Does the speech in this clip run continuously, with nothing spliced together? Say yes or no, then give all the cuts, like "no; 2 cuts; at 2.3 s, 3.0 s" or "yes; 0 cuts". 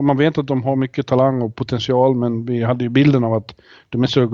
yes; 0 cuts